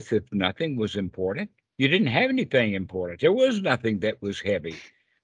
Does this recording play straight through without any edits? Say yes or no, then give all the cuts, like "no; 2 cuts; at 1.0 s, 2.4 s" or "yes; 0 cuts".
yes; 0 cuts